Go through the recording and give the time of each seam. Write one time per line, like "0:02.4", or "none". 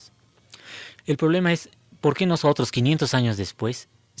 0:01.0